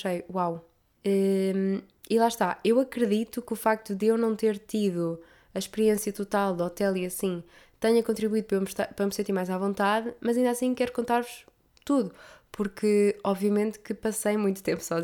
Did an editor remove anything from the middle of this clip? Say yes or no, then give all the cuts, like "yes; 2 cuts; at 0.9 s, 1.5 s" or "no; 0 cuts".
yes; 1 cut; at 0.9 s